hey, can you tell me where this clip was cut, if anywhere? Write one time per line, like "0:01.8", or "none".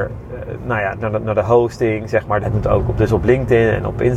0:00.9
0:02.4